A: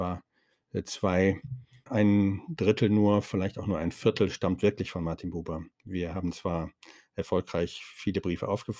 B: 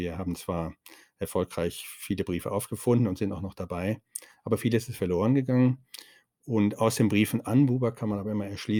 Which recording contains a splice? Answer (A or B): A